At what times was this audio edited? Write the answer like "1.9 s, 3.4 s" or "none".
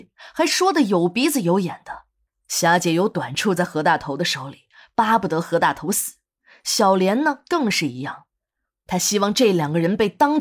2.3 s